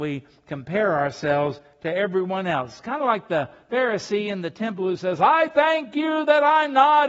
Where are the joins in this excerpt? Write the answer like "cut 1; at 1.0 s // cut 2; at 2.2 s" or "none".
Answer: none